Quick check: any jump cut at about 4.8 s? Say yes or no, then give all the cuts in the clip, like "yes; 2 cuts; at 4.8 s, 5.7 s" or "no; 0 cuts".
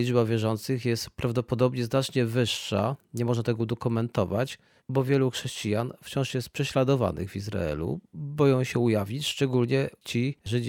yes; 1 cut; at 4.8 s